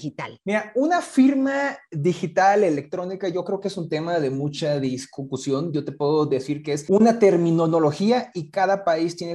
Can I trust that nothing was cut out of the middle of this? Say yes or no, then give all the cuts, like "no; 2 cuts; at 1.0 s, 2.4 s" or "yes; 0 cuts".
yes; 0 cuts